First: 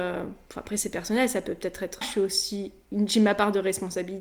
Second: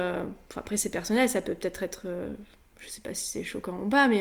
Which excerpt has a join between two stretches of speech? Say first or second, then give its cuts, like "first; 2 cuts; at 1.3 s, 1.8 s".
first; 1 cut; at 2.0 s